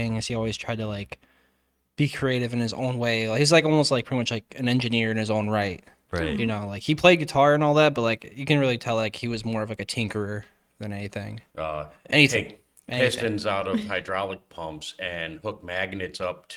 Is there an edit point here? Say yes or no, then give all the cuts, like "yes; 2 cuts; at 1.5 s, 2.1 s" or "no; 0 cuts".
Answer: yes; 1 cut; at 11.5 s